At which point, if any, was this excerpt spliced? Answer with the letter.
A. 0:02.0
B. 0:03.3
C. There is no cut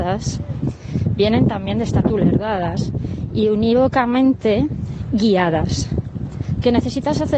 A